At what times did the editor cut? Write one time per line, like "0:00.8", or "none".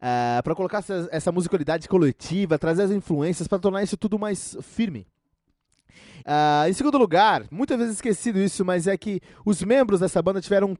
0:06.2
0:07.5